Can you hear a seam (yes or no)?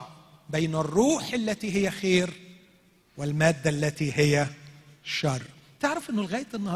no